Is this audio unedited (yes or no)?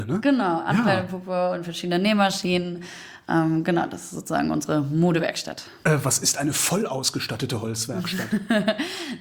yes